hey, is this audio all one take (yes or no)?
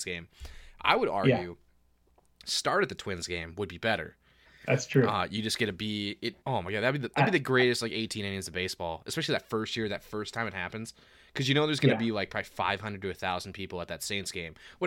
no